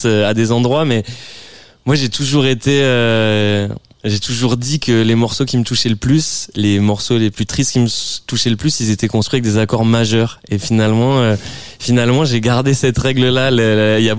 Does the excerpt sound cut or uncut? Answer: uncut